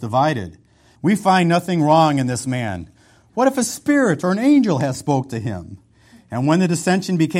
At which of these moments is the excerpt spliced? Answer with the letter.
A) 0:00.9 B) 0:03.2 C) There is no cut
A